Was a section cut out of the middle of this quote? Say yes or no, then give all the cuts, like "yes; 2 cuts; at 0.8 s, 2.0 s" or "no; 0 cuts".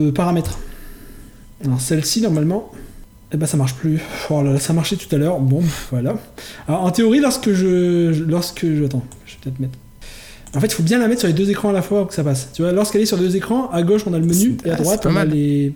no; 0 cuts